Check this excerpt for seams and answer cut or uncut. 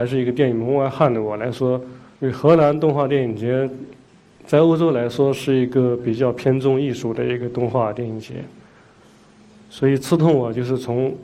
cut